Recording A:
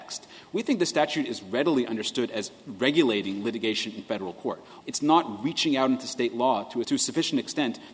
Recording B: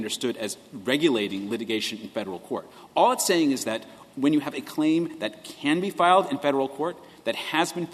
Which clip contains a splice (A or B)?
A